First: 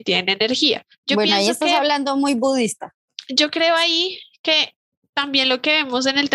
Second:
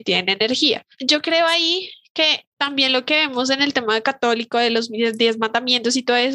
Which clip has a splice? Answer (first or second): second